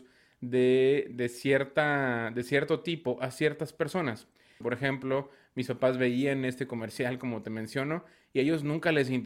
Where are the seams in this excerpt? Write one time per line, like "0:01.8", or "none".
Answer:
0:04.6